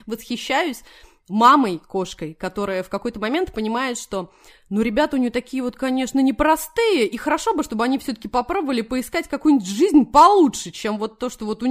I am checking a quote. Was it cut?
no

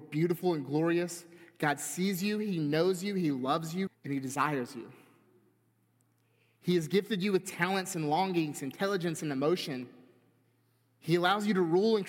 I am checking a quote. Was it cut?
yes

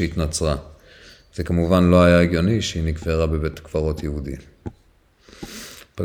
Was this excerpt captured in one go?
yes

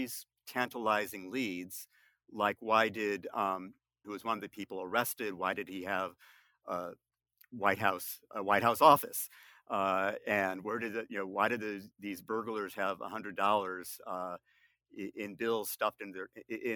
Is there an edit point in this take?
yes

